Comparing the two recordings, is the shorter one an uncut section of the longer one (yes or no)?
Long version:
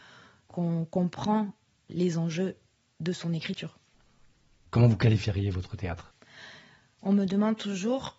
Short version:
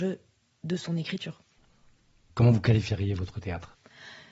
yes